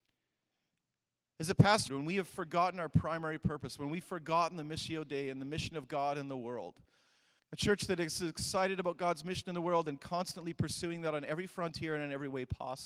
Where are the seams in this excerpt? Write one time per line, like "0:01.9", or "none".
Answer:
0:01.9
0:07.4

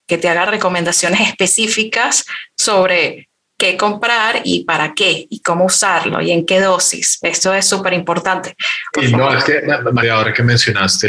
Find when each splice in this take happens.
0:08.9
0:10.0

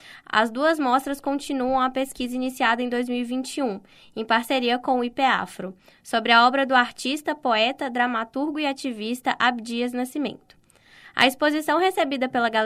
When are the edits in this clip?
none

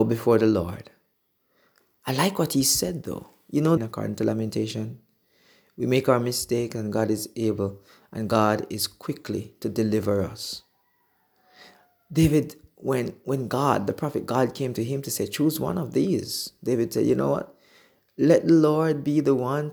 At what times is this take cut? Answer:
0:03.8

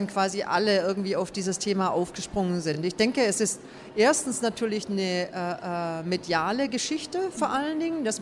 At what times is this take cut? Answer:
none

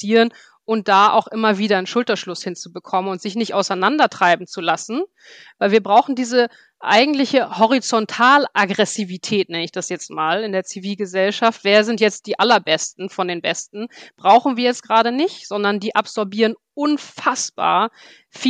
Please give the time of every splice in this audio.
none

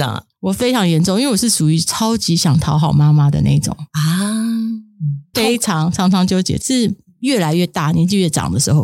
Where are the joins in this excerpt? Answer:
0:05.3
0:06.6

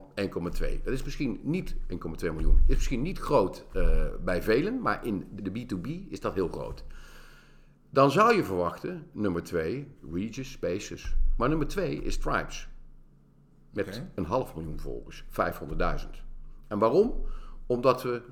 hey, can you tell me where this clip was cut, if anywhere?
0:05.4

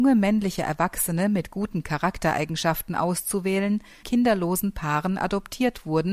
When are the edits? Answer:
0:04.0

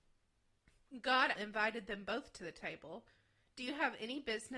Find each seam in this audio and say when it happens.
0:01.3

